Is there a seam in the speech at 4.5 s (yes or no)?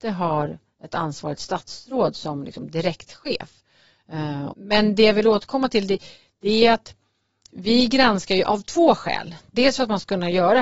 yes